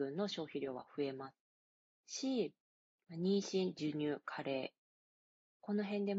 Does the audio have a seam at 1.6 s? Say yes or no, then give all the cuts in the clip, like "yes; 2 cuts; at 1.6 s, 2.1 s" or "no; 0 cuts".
no; 0 cuts